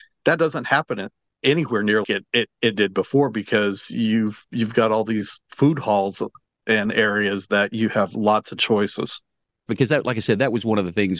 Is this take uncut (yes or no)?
no